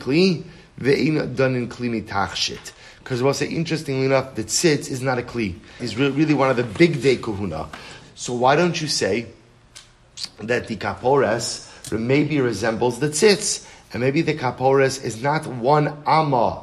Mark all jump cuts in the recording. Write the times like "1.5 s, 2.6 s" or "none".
5.8 s, 8.0 s